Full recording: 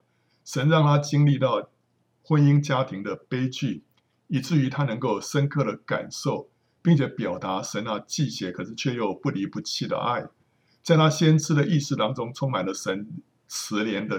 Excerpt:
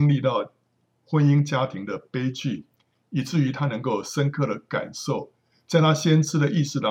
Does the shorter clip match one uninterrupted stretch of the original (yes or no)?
no